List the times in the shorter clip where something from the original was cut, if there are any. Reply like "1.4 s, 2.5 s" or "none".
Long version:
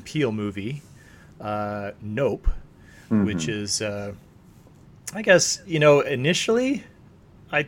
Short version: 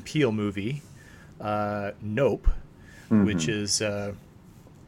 none